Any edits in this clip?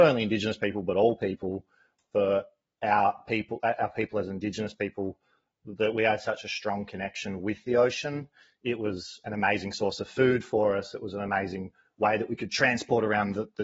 no; 0 cuts

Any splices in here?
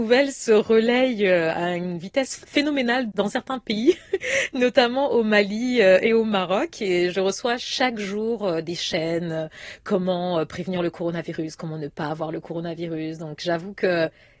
no; 0 cuts

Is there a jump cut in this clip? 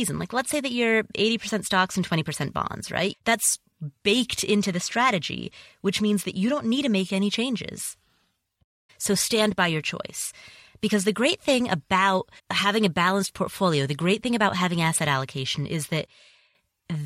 yes; 3 cuts; at 3.1 s, 8.9 s, 12.4 s

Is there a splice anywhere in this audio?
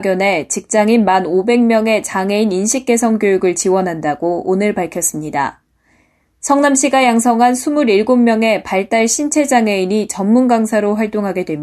no; 0 cuts

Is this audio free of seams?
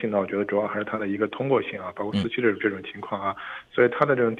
yes; 0 cuts

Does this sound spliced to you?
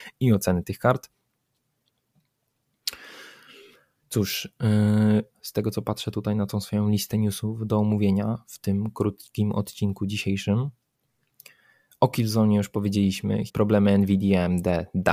yes; 2 cuts; at 5.3 s, 13.5 s

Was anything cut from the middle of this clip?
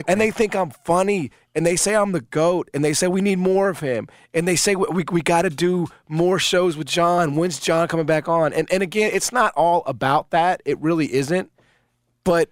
no; 0 cuts

